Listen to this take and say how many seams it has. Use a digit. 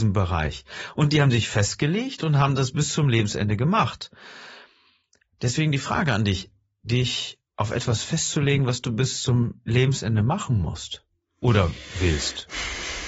1